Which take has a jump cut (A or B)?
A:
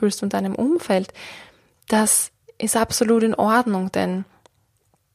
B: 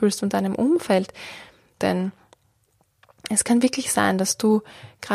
B